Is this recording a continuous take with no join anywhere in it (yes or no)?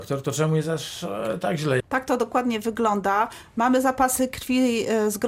no